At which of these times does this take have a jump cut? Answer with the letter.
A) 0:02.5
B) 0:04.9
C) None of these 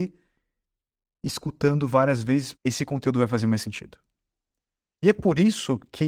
A